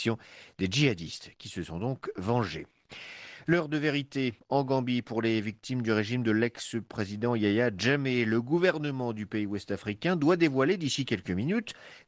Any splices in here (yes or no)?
no